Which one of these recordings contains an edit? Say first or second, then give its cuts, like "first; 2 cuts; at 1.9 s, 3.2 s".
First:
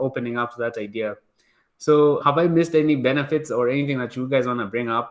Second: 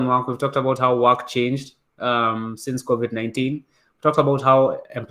first; 1 cut; at 2.2 s